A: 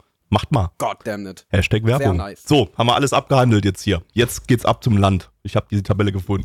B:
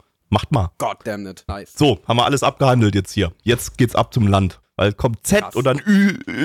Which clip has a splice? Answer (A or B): B